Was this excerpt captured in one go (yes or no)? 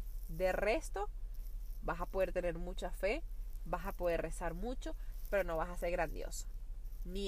no